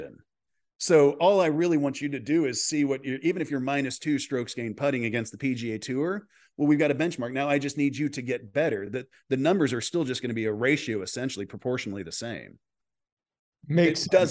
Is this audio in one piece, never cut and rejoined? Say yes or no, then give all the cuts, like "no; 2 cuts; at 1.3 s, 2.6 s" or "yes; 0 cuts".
yes; 0 cuts